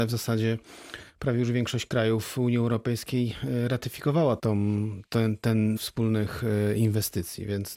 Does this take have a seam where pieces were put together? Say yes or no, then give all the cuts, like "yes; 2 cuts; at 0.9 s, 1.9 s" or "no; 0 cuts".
yes; 2 cuts; at 4.4 s, 5.8 s